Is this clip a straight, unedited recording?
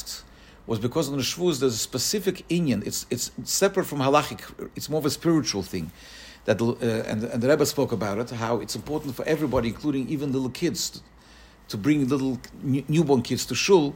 yes; 0 cuts

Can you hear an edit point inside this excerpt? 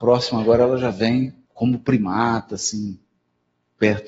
yes; 1 cut; at 1.5 s

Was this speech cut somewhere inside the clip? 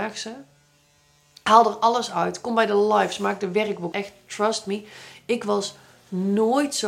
yes; 1 cut; at 3.9 s

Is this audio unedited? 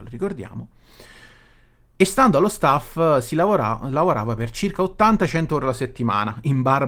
yes; 0 cuts

